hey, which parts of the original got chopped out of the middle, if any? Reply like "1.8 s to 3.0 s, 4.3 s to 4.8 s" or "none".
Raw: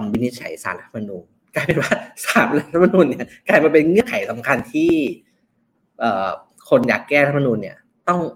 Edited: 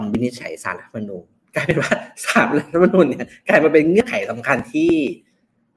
none